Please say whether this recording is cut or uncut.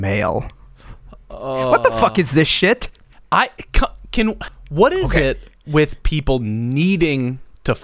uncut